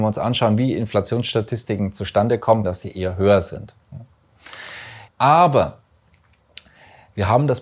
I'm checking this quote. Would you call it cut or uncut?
cut